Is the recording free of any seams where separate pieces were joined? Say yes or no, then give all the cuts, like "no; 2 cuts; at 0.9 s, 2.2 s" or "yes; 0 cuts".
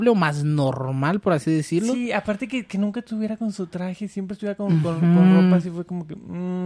yes; 0 cuts